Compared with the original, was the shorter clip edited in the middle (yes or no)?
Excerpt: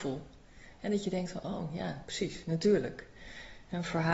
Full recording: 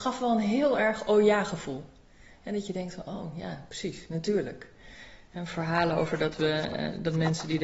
no